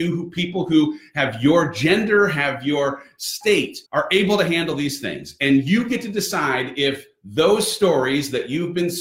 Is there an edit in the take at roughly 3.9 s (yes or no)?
yes